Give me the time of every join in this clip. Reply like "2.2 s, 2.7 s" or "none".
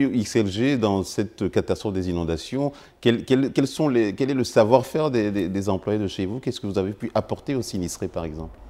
none